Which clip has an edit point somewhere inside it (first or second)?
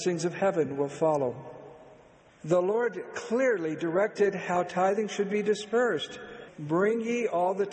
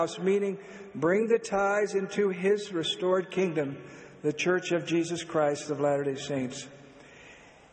first